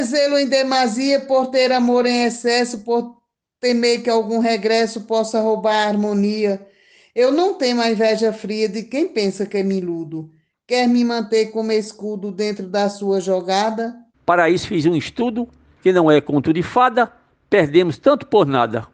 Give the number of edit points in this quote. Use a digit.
2